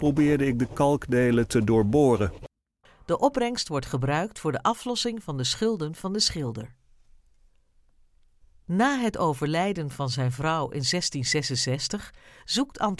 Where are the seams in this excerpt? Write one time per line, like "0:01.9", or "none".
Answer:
0:02.8